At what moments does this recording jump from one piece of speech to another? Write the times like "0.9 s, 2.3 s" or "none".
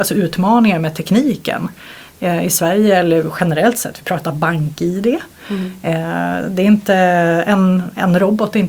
none